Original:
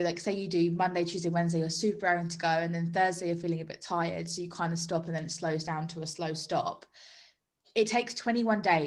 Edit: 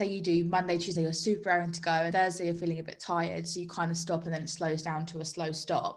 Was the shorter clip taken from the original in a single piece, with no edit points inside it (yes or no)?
no